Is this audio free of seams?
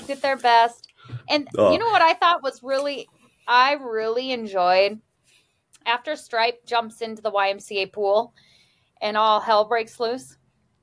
yes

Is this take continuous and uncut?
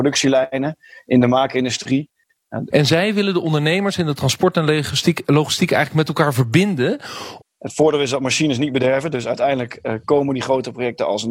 no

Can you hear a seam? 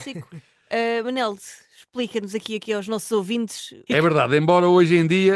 yes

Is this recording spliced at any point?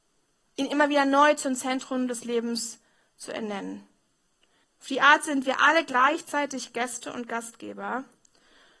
yes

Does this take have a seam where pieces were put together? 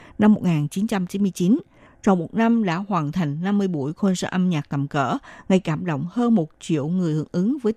yes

